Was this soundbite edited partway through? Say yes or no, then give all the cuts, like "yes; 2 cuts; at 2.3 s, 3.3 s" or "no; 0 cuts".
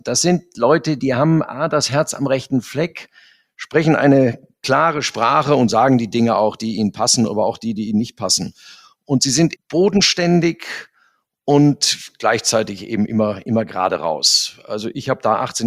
yes; 1 cut; at 9.6 s